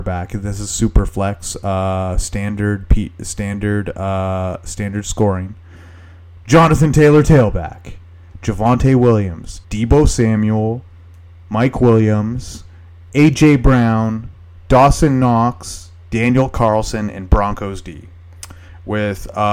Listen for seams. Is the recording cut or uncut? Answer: cut